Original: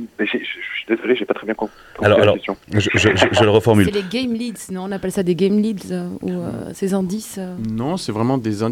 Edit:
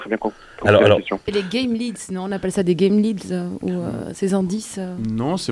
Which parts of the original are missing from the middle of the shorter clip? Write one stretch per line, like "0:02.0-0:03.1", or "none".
0:02.6-0:03.9